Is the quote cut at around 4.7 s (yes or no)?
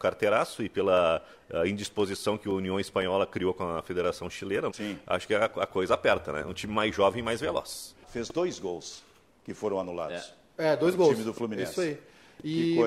yes